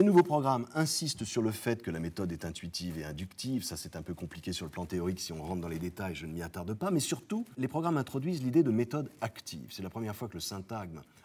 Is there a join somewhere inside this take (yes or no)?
no